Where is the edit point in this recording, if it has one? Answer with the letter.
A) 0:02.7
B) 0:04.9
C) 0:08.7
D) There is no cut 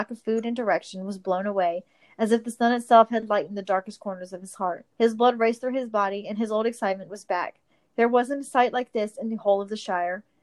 B